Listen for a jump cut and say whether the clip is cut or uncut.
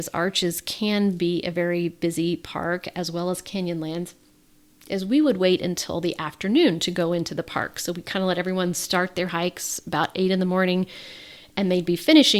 uncut